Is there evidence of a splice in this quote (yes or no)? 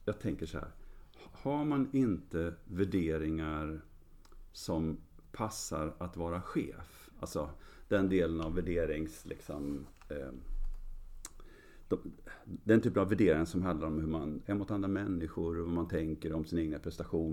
yes